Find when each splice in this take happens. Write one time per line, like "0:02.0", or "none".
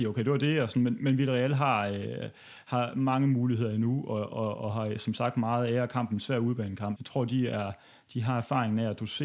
0:07.0